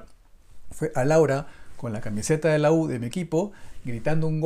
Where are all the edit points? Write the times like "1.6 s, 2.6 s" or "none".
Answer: none